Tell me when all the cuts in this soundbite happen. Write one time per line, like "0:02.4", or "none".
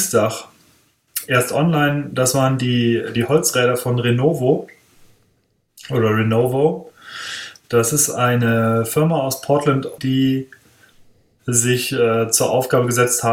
0:10.0